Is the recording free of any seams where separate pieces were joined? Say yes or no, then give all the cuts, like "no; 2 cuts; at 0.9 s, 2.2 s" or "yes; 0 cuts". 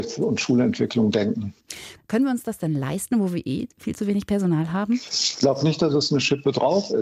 no; 1 cut; at 2.0 s